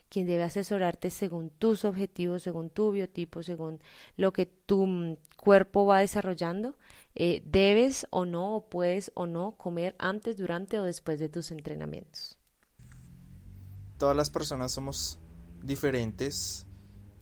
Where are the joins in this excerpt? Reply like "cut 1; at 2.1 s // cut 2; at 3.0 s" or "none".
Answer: cut 1; at 13.9 s